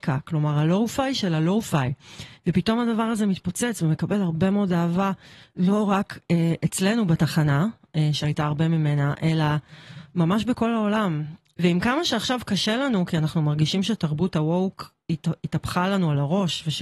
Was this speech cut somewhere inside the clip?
yes; 1 cut; at 11.5 s

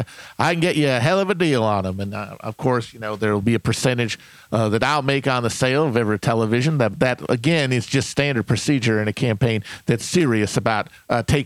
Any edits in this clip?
no; 0 cuts

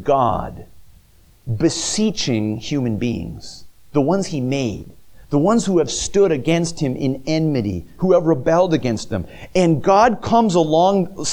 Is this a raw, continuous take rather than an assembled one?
yes; 0 cuts

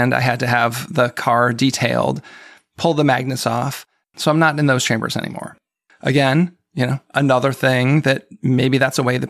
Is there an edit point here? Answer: yes; 2 cuts; at 4.1 s, 5.9 s

